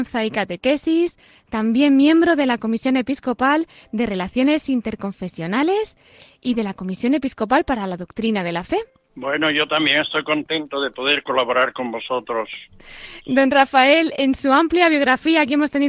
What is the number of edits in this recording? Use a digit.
1